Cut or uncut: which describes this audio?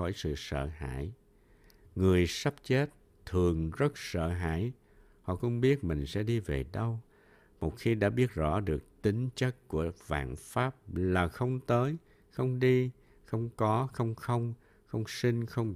uncut